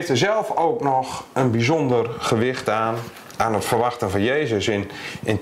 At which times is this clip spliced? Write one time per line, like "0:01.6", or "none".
none